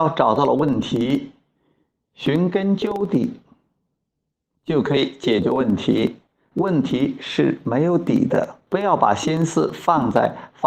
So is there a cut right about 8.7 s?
yes; 2 cuts; at 6.5 s, 8.7 s

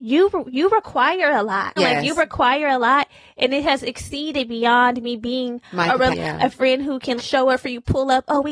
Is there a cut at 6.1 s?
yes; 3 cuts; at 1.8 s, 6.1 s, 7.2 s

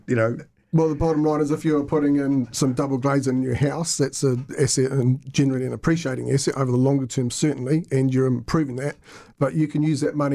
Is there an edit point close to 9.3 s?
yes; 1 cut; at 9.3 s

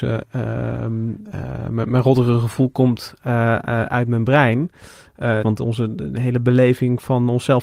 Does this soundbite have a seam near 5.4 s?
yes; 1 cut; at 5.4 s

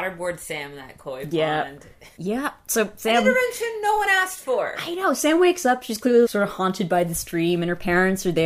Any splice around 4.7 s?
no; 2 cuts; at 2.2 s, 6.2 s

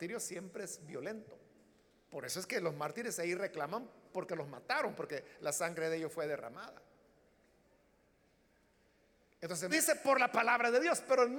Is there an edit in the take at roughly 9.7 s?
yes; 1 cut; at 9.7 s

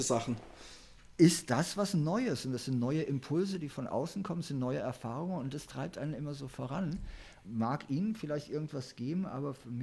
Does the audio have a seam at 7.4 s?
yes; 1 cut; at 7.4 s

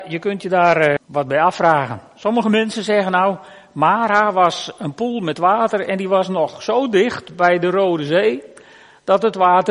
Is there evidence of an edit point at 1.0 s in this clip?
yes; 1 cut; at 1.0 s

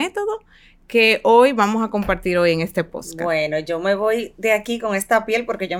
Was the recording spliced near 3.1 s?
no; 0 cuts

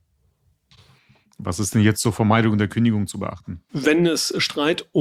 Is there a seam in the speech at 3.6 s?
no; 0 cuts

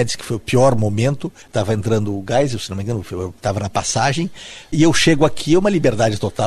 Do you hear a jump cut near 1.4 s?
yes; 1 cut; at 1.4 s

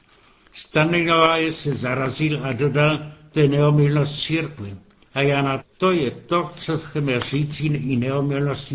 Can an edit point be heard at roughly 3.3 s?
no; 1 cut; at 5.6 s

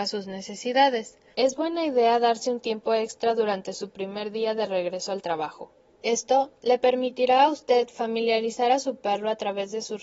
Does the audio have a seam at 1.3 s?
yes; 2 cuts; at 1.3 s, 5.9 s

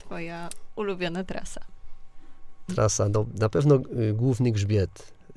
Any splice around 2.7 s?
yes; 1 cut; at 2.7 s

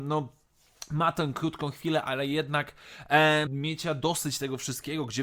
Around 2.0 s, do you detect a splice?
no; 1 cut; at 3.5 s

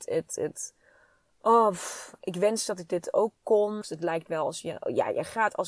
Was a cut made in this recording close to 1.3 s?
no; 1 cut; at 3.8 s

